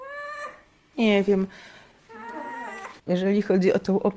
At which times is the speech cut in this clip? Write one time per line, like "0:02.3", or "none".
0:03.0